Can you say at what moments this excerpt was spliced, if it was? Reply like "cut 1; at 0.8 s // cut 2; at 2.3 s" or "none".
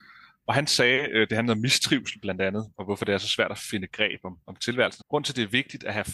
cut 1; at 5.0 s